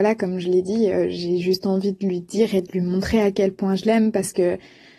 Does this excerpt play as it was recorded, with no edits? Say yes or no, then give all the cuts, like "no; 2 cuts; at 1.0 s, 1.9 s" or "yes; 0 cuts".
yes; 0 cuts